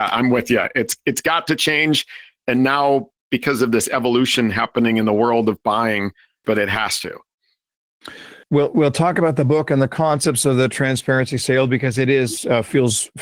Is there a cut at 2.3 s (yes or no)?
no